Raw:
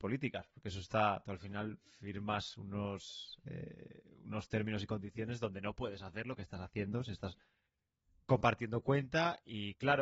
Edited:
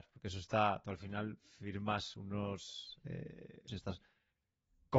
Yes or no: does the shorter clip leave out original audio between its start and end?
yes